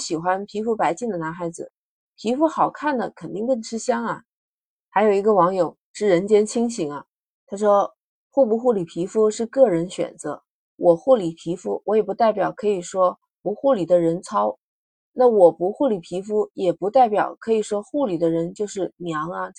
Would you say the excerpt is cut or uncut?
uncut